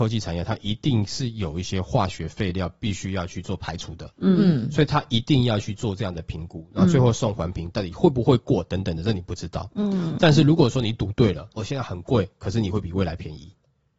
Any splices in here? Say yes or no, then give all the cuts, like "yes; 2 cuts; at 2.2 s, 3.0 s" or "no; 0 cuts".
yes; 1 cut; at 11.6 s